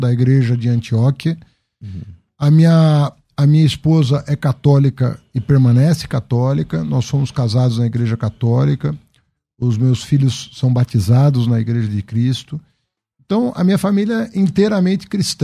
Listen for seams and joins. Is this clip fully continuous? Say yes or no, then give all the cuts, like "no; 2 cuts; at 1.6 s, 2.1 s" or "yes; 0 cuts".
yes; 0 cuts